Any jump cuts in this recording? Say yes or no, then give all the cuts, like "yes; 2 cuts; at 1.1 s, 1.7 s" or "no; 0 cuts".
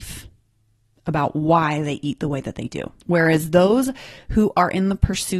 yes; 1 cut; at 3.0 s